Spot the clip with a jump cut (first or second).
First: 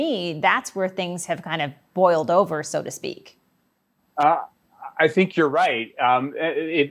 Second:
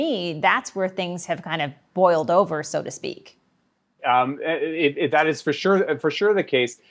second